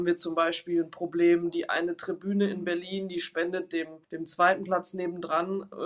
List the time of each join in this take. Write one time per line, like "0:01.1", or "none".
0:04.0